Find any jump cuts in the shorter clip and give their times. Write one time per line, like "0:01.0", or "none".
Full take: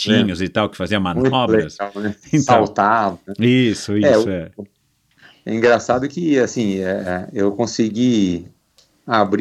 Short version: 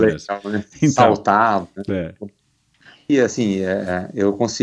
0:01.9
0:03.1